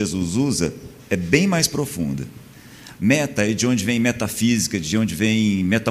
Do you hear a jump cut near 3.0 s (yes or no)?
yes